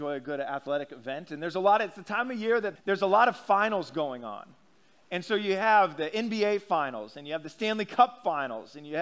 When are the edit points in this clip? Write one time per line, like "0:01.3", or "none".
0:02.8

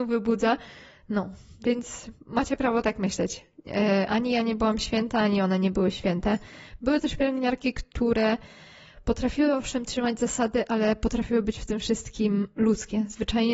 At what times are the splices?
0:01.0

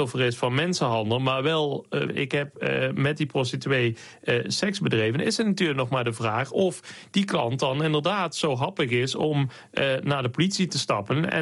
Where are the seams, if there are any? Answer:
0:02.1

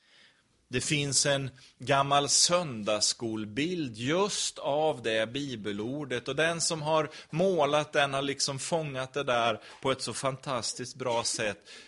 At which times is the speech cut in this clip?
none

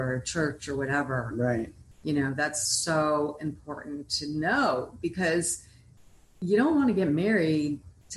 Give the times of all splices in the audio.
none

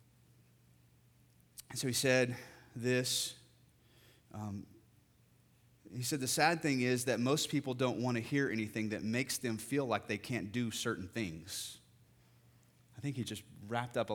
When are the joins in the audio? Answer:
none

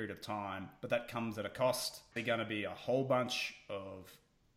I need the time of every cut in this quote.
0:02.1

